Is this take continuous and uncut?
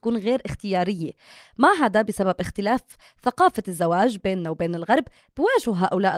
yes; 0 cuts

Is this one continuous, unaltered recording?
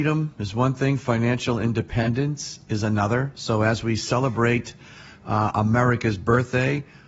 yes; 0 cuts

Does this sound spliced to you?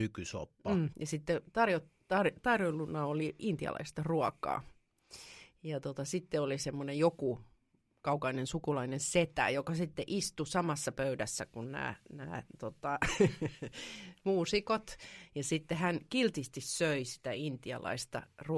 yes; 1 cut; at 0.9 s

